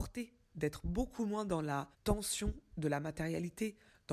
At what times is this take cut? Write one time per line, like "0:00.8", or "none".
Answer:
0:01.9